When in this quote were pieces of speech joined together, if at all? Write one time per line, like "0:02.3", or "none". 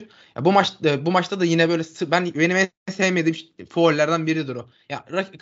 none